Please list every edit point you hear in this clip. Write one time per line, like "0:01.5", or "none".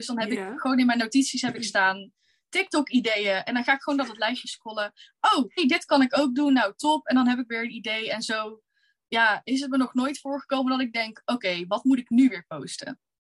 0:05.6